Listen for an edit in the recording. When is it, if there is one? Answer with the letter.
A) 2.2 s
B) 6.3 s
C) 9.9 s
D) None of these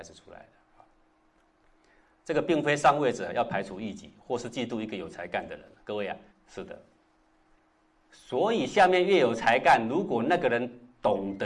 B